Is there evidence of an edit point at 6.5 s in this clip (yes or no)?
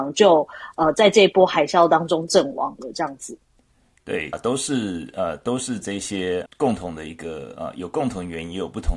yes